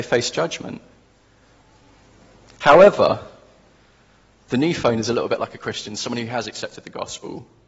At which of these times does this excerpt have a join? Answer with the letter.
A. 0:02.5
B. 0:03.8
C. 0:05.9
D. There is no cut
D